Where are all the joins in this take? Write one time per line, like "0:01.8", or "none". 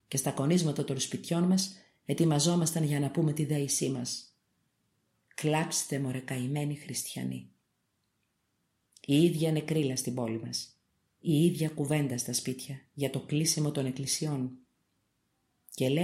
0:08.9